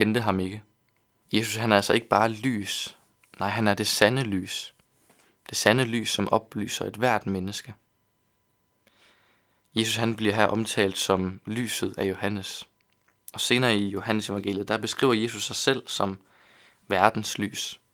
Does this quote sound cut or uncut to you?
cut